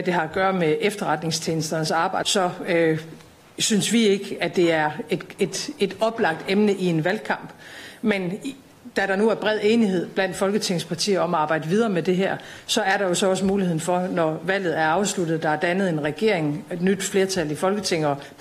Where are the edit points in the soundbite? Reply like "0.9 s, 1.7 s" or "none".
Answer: 2.2 s